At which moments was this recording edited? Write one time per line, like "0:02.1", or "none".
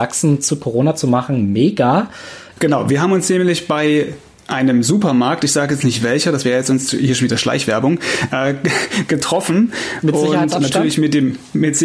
0:02.5